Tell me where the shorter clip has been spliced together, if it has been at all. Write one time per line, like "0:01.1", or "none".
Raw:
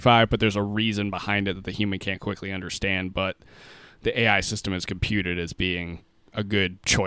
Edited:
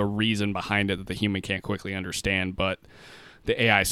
none